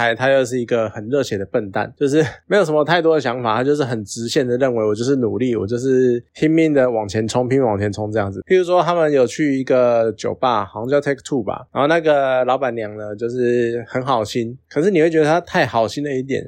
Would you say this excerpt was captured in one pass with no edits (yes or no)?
no